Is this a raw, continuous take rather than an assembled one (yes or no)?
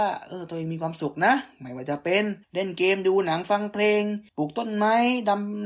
no